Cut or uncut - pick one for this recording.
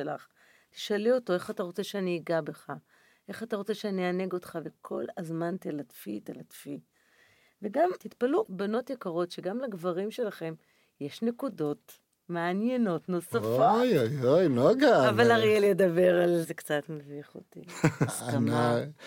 cut